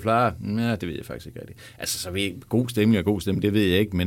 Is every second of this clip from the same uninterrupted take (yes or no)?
yes